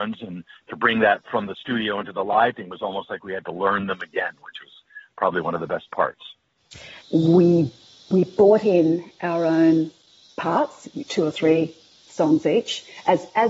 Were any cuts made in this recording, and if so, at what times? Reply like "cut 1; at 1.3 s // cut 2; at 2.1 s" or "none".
cut 1; at 7.0 s